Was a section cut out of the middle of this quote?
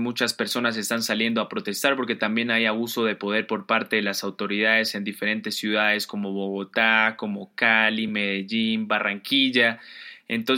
no; 0 cuts

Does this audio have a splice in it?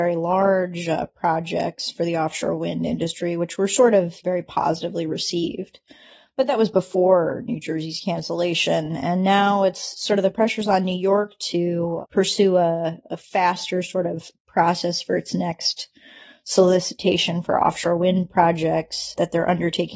no; 0 cuts

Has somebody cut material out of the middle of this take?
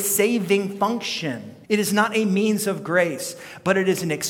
yes; 1 cut; at 1.6 s

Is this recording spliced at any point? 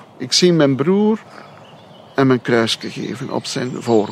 no; 0 cuts

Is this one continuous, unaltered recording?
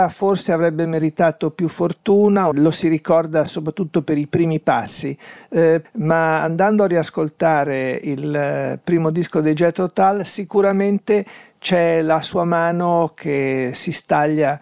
no; 2 cuts; at 2.5 s, 5.8 s

